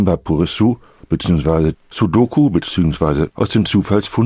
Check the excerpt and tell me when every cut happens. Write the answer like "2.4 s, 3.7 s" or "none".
1.7 s, 3.3 s